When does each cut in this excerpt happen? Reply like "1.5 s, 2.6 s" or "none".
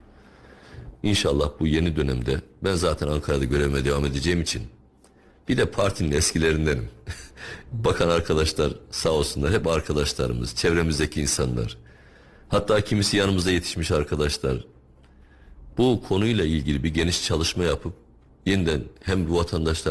1.0 s